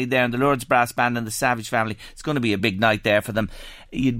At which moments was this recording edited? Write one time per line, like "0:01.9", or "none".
0:02.6